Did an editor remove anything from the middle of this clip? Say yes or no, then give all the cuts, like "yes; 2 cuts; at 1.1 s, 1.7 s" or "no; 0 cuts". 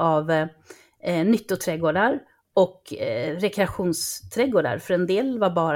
no; 0 cuts